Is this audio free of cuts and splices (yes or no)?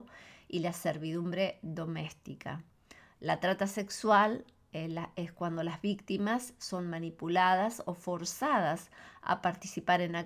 yes